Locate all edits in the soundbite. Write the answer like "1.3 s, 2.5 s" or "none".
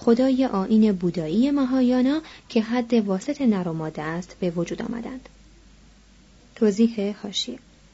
none